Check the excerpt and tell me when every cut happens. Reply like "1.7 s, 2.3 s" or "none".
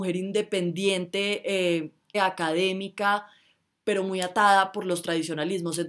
2.1 s, 3.8 s